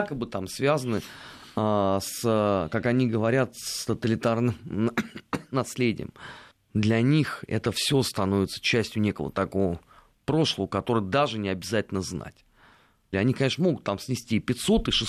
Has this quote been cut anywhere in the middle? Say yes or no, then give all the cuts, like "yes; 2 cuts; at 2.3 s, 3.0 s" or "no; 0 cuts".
yes; 2 cuts; at 6.5 s, 13.1 s